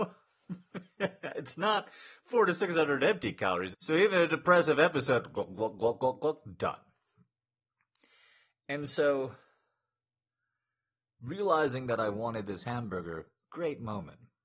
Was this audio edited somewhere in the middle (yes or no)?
yes